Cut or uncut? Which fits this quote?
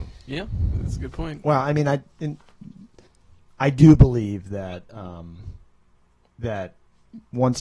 uncut